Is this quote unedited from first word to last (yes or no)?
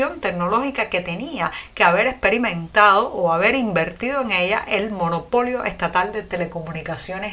yes